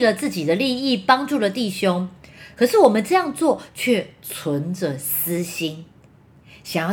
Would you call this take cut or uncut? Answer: uncut